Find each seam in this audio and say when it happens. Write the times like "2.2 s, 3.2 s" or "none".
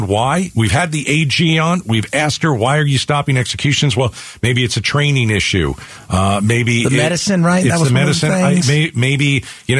none